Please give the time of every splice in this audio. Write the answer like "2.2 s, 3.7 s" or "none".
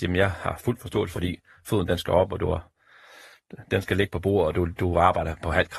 1.1 s, 3.7 s